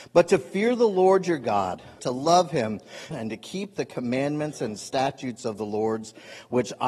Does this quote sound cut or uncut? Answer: cut